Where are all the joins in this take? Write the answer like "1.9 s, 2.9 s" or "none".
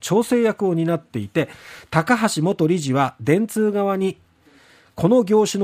none